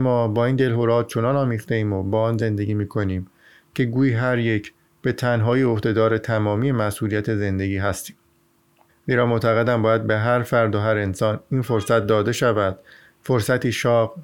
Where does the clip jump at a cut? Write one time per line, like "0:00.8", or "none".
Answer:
0:08.9